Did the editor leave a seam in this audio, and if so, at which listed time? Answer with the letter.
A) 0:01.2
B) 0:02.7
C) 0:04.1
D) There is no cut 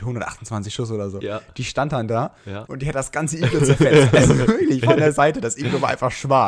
B